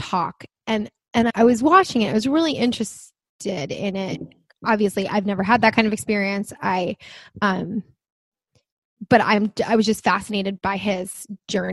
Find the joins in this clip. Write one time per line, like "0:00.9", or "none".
0:01.3